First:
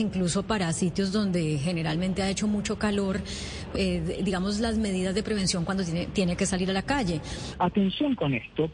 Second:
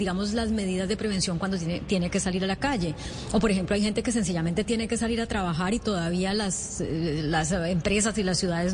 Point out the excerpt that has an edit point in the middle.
first; 2 cuts; at 3.7 s, 7.5 s

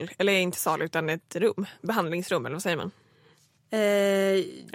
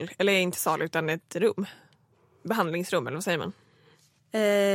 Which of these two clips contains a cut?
first; 1 cut; at 1.8 s

